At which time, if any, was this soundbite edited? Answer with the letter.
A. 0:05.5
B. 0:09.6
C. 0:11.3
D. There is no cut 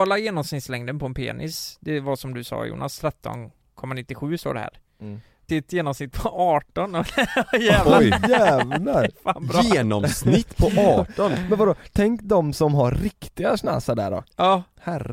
A